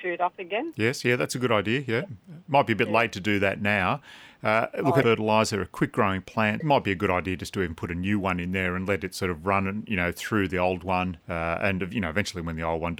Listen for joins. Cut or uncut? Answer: cut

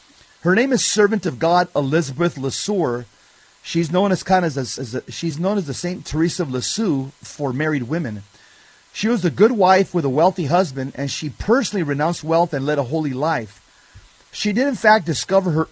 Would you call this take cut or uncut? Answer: uncut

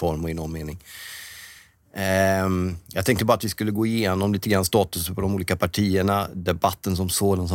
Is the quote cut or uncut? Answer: uncut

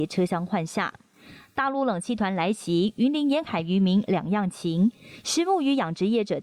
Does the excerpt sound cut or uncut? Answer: uncut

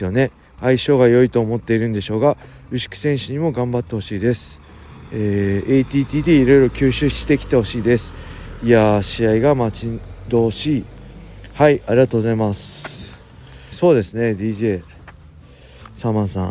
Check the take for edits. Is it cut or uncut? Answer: cut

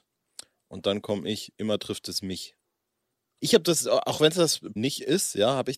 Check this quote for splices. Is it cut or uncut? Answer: cut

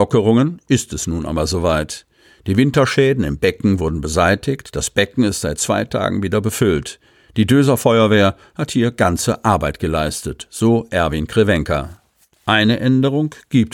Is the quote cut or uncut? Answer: uncut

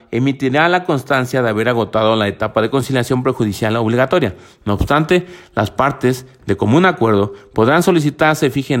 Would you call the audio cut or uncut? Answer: uncut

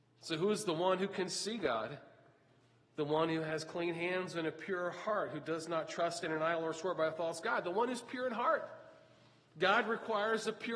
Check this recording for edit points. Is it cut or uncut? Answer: uncut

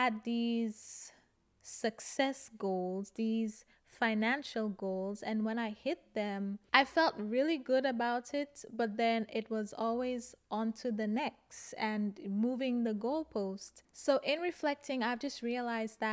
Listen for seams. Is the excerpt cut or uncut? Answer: cut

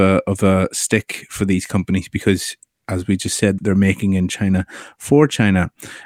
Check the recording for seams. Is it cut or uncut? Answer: cut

